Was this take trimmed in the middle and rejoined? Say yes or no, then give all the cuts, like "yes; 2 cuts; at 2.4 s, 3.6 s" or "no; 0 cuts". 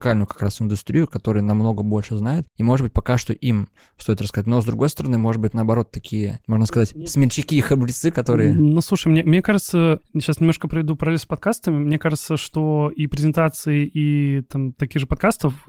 no; 0 cuts